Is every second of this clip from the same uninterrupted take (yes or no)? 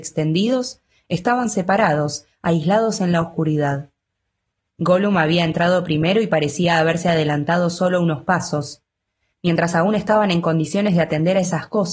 yes